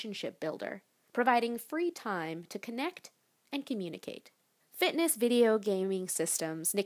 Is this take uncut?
no; 1 cut; at 4.6 s

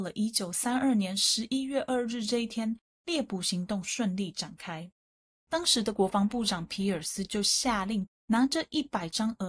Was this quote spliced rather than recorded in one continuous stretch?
yes; 1 cut; at 8.1 s

